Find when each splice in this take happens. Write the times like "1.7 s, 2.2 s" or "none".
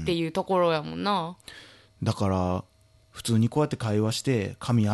none